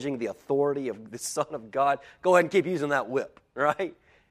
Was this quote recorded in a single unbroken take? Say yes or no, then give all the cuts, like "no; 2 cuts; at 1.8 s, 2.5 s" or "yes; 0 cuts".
yes; 0 cuts